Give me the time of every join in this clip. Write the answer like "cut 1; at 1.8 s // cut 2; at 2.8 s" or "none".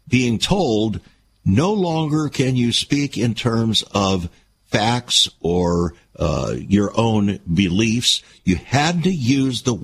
cut 1; at 8.4 s